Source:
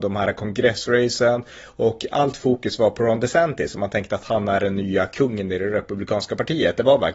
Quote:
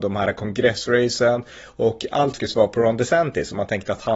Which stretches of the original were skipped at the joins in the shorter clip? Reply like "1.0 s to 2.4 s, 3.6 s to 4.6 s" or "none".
2.4 s to 2.6 s